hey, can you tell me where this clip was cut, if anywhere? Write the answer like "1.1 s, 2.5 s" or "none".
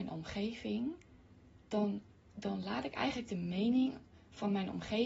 1.6 s